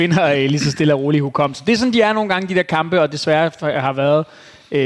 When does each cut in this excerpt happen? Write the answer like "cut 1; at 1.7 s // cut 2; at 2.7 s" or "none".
none